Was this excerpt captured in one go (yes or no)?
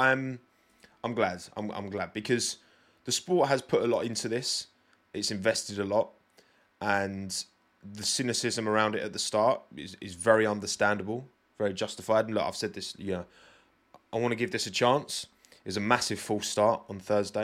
yes